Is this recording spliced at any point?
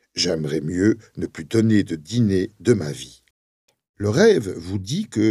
no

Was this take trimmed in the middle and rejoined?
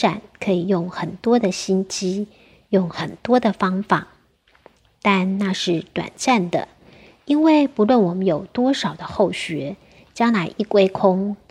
no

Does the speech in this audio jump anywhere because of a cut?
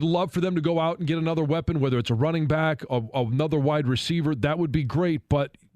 no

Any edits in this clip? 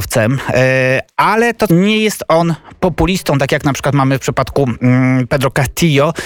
yes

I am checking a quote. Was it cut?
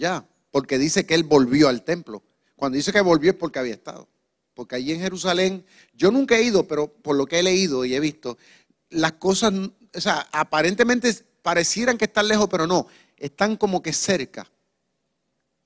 yes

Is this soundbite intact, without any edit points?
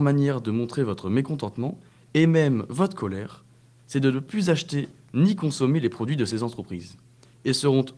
yes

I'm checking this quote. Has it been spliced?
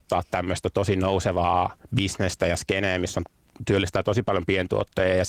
yes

